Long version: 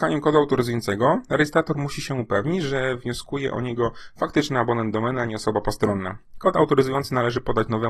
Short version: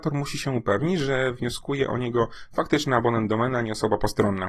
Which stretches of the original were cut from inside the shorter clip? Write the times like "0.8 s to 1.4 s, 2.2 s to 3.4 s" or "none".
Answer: none